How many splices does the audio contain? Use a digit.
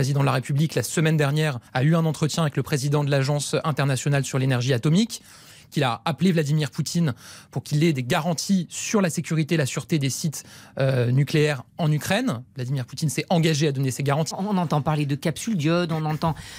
2